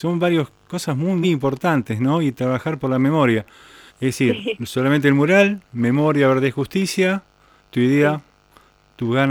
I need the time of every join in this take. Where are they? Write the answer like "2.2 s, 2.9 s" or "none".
1.2 s, 3.9 s